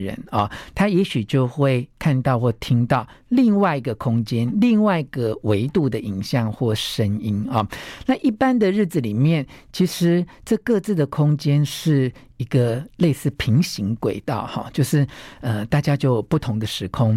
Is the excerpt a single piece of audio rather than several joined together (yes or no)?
yes